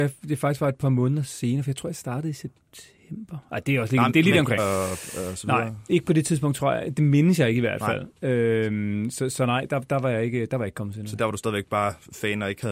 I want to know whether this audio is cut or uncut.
cut